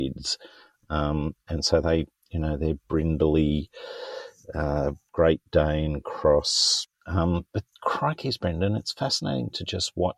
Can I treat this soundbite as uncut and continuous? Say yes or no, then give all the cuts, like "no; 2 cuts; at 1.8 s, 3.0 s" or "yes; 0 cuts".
no; 1 cut; at 5.1 s